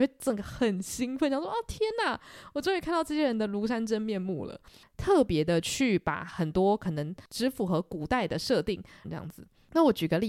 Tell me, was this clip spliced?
yes; 2 cuts; at 4.8 s, 9.0 s

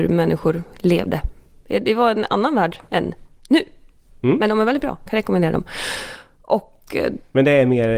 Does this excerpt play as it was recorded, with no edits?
yes; 0 cuts

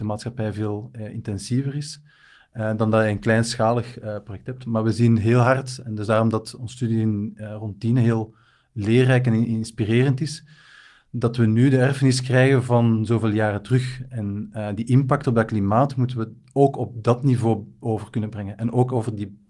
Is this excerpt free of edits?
yes; 0 cuts

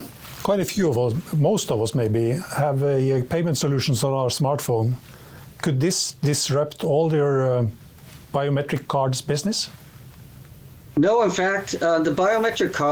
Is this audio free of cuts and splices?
yes; 0 cuts

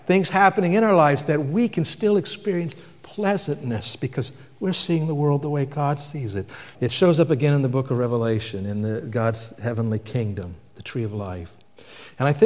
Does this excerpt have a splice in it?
yes; 1 cut; at 6.8 s

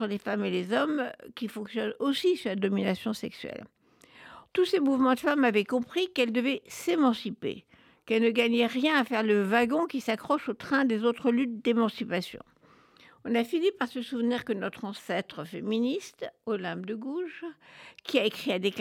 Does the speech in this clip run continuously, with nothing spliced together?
no; 1 cut; at 4.5 s

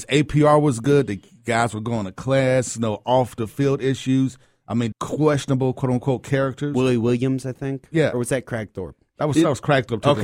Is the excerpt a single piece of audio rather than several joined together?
no; 1 cut; at 4.9 s

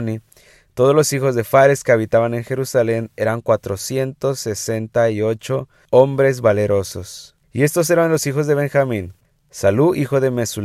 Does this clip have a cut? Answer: no; 0 cuts

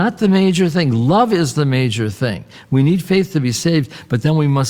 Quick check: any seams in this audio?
no; 0 cuts

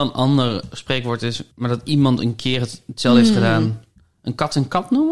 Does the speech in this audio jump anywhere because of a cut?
yes; 1 cut; at 1.5 s

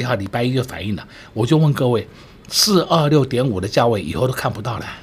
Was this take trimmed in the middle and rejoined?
no; 0 cuts

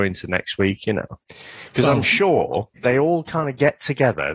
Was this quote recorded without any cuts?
no; 2 cuts; at 1.2 s, 2.8 s

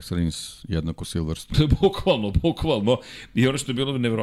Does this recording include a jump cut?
no; 0 cuts

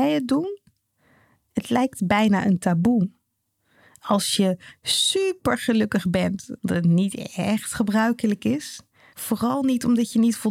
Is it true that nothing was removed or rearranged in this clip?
no; 2 cuts; at 6.6 s, 9.1 s

